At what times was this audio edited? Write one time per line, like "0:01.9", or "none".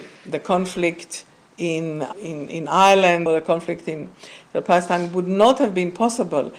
0:02.1
0:03.3

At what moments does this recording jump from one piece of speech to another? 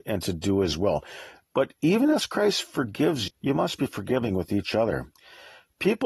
0:03.3

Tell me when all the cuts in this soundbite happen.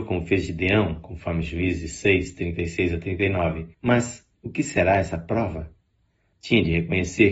0:03.7
0:06.3

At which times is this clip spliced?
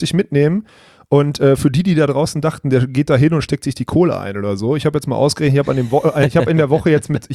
none

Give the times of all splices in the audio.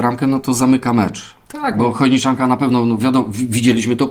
none

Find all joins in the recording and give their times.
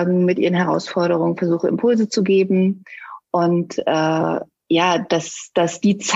none

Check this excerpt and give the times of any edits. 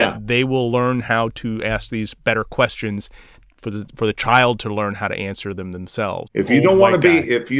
0:06.3

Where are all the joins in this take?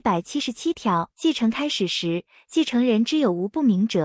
0:01.1

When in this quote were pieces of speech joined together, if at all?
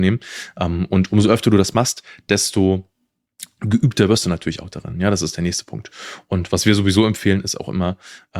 none

